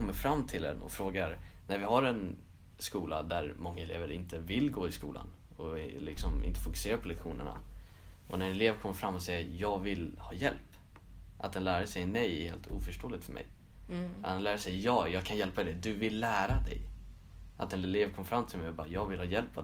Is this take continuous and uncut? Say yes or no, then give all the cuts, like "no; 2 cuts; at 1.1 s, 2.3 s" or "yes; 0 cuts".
no; 1 cut; at 17.5 s